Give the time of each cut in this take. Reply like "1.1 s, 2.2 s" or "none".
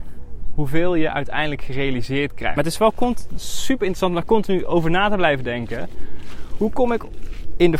2.6 s

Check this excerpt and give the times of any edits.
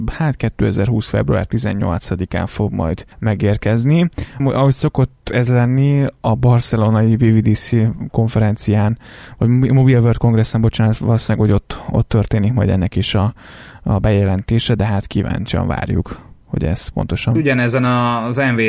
3.1 s, 4.4 s

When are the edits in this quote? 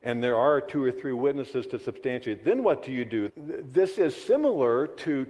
3.3 s

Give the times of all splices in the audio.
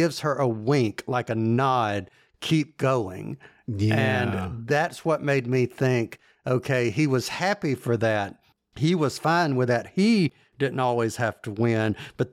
none

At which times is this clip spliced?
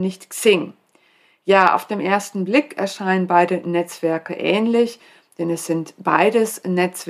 none

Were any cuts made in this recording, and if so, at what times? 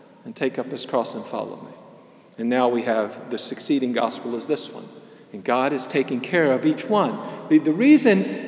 none

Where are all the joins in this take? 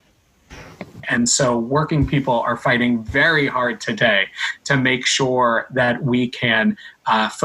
1.0 s

